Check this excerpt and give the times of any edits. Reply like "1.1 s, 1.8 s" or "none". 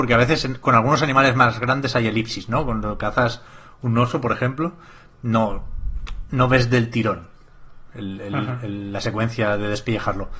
none